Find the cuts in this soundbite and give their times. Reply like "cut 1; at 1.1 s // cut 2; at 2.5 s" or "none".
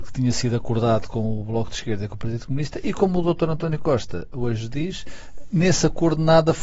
none